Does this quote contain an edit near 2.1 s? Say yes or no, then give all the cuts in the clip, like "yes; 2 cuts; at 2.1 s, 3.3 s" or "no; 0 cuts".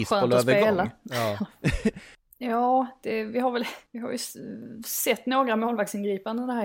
yes; 2 cuts; at 2.1 s, 3.9 s